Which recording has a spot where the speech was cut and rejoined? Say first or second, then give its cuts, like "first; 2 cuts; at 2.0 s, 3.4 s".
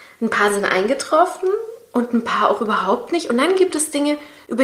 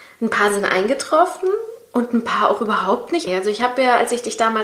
second; 1 cut; at 3.3 s